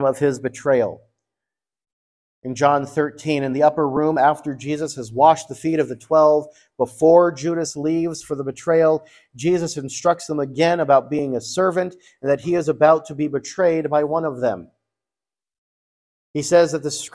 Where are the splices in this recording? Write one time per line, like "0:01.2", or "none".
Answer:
none